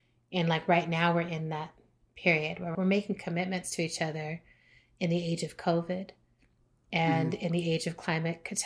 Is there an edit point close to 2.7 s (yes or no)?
yes